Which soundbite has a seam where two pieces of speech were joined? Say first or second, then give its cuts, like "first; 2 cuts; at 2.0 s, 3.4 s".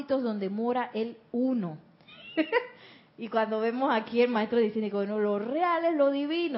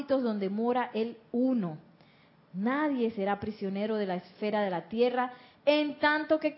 first; 1 cut; at 2.1 s